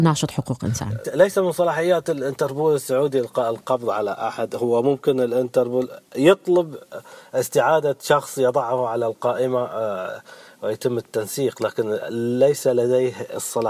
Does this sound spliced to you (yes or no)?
yes